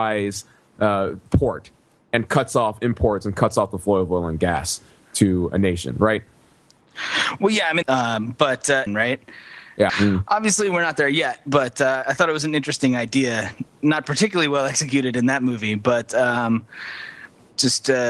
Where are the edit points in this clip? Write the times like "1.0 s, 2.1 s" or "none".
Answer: 7.8 s, 8.9 s, 9.9 s